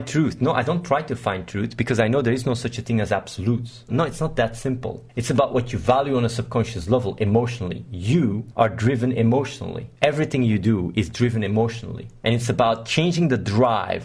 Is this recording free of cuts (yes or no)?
no